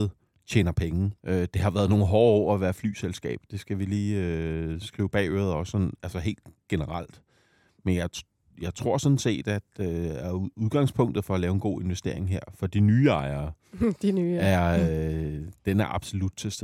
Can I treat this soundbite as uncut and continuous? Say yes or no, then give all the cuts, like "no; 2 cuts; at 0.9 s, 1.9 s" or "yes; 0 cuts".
no; 1 cut; at 1.2 s